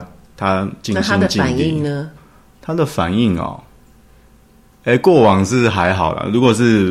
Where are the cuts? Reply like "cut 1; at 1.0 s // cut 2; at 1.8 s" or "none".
none

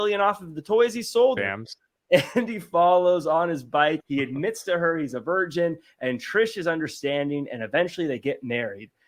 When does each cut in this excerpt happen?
cut 1; at 1.4 s // cut 2; at 4.0 s

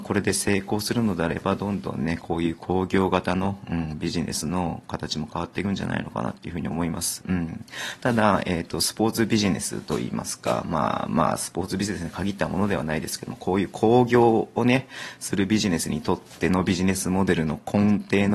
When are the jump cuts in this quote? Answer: cut 1; at 7.2 s

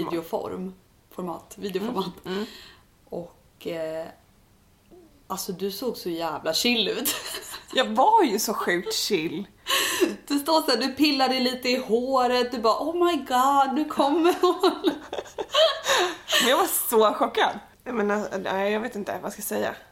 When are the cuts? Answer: cut 1; at 17.7 s

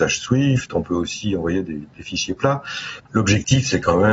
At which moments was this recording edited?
cut 1; at 3.0 s

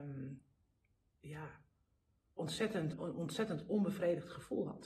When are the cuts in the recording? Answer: cut 1; at 2.9 s

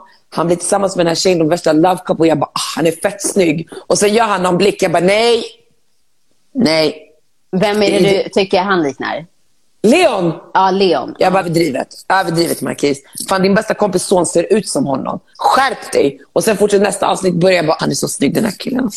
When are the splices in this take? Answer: cut 1; at 11.4 s // cut 2; at 17.8 s

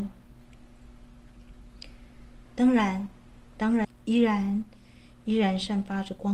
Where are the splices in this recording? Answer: cut 1; at 2.5 s // cut 2; at 3.8 s

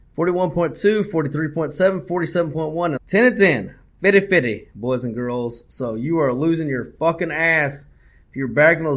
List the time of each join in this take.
cut 1; at 3.0 s

